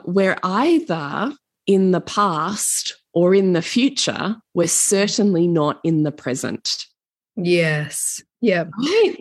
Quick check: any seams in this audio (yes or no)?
no